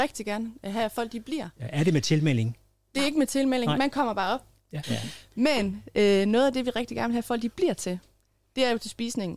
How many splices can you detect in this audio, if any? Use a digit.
1